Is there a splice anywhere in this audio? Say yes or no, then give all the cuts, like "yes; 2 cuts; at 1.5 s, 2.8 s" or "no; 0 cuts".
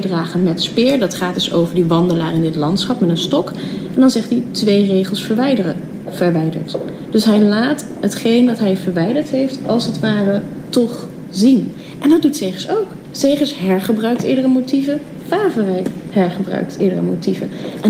no; 0 cuts